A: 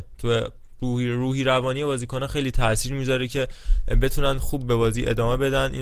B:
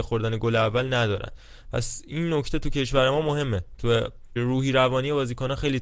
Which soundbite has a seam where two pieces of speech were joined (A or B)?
B